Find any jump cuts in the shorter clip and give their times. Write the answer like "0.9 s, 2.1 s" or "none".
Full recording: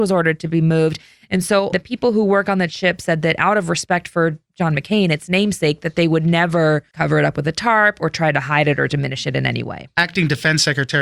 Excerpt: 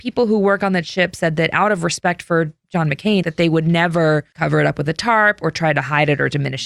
3.2 s